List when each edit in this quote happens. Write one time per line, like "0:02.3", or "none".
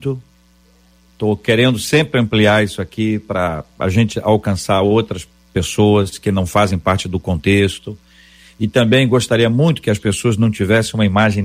0:01.1